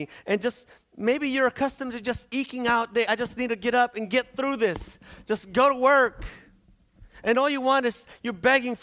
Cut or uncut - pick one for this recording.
uncut